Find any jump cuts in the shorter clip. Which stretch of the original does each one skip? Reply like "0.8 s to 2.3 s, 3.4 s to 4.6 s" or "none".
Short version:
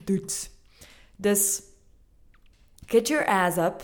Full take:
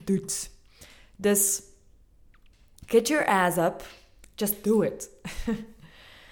none